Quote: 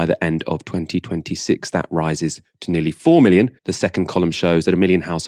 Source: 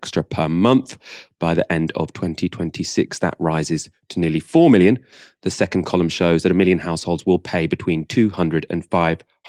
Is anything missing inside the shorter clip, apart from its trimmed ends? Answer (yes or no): yes